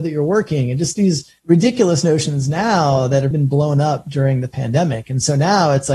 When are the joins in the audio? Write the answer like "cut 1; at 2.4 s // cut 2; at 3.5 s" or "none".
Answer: cut 1; at 1.4 s // cut 2; at 3.3 s